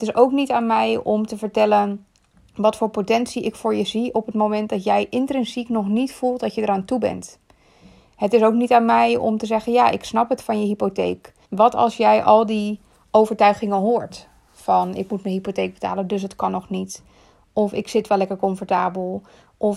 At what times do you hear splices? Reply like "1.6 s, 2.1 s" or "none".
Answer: 11.4 s